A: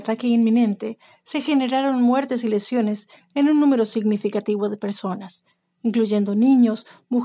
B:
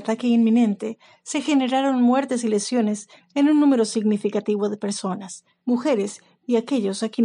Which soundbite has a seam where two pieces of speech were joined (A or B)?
B